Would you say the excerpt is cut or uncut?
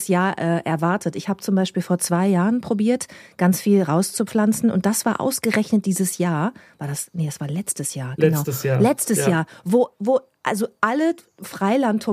uncut